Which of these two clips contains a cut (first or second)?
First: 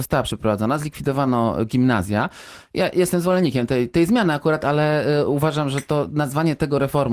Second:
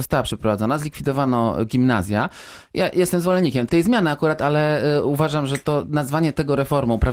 second